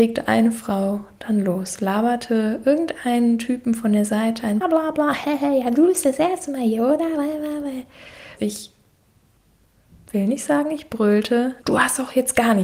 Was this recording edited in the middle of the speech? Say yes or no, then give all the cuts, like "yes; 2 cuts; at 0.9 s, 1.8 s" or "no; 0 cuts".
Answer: yes; 3 cuts; at 4.6 s, 8.4 s, 11.6 s